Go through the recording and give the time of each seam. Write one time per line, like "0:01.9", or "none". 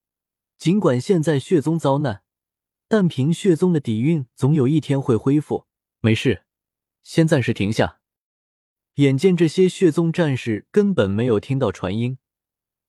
0:06.0